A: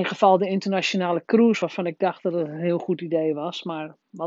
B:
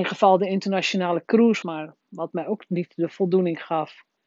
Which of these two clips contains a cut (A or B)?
B